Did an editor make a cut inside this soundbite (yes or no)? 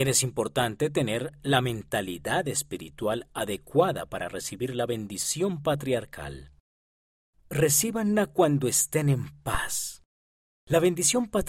no